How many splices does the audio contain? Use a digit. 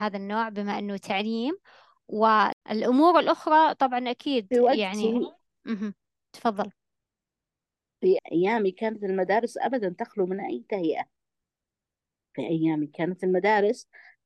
1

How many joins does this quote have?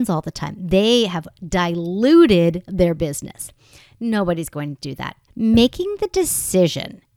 1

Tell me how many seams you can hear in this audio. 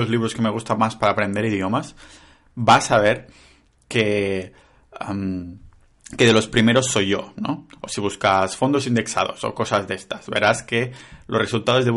0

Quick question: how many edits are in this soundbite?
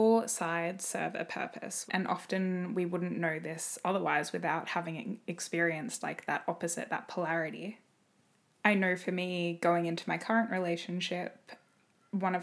1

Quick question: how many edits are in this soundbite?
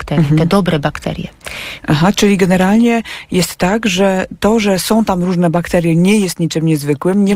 1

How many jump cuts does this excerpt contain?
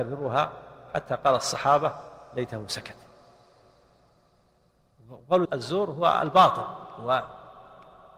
1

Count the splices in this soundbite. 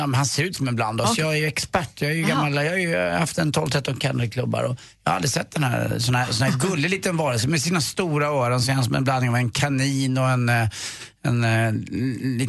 0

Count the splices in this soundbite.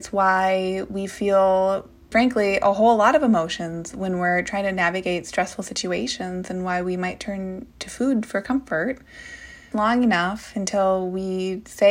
2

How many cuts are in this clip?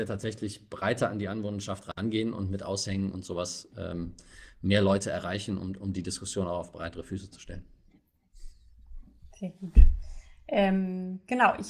0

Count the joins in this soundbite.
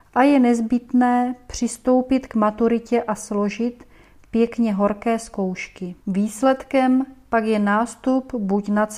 1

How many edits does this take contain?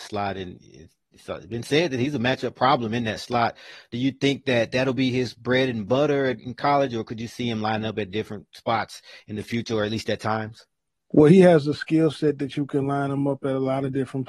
0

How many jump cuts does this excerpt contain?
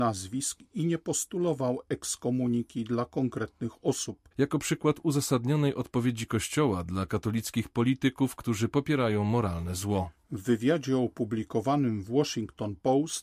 1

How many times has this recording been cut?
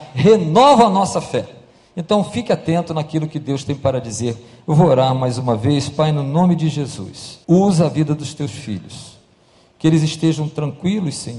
1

